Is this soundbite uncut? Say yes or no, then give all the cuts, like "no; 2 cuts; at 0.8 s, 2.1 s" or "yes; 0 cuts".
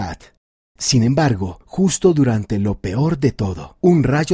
yes; 0 cuts